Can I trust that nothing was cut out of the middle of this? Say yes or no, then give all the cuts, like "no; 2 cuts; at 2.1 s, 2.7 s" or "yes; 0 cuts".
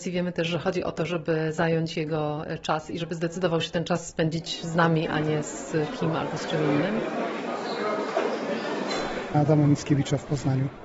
no; 1 cut; at 9.3 s